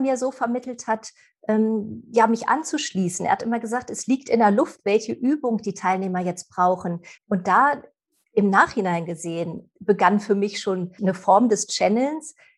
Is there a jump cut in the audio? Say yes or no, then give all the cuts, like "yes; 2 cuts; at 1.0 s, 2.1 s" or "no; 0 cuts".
yes; 2 cuts; at 7.2 s, 11.0 s